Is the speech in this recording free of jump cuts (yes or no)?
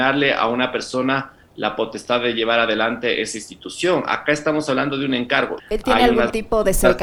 no